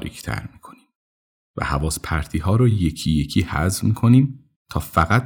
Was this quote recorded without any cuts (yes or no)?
yes